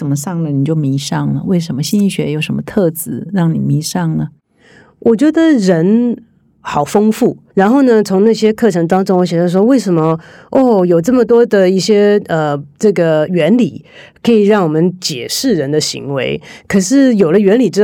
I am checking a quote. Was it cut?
yes; 1 cut; at 7.5 s

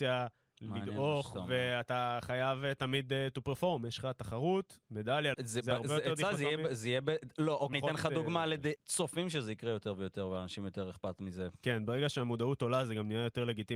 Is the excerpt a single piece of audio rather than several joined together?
no; 3 cuts; at 5.3 s, 7.7 s, 8.8 s

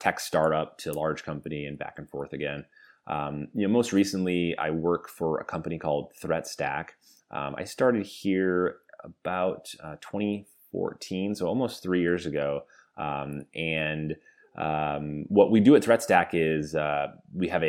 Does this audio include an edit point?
no; 0 cuts

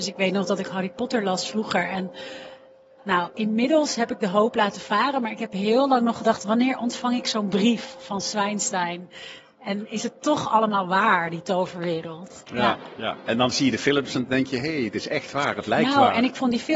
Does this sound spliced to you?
no; 0 cuts

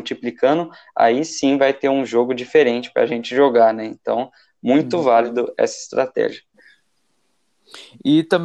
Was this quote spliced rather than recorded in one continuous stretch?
no; 0 cuts

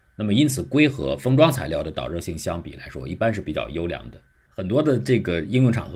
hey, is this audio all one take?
no; 1 cut; at 4.5 s

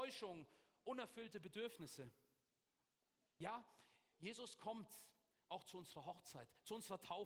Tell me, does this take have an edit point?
no; 0 cuts

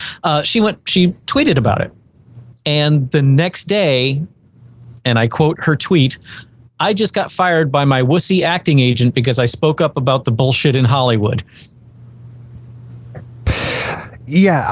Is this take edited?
no; 0 cuts

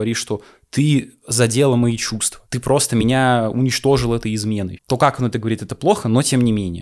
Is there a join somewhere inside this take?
yes; 2 cuts; at 2.5 s, 4.8 s

